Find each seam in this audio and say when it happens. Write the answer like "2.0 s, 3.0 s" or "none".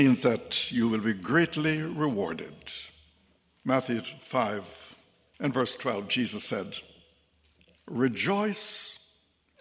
none